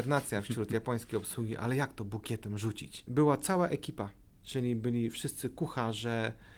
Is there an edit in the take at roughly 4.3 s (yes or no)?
no